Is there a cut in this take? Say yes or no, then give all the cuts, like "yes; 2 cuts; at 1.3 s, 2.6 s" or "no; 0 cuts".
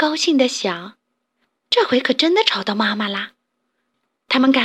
no; 0 cuts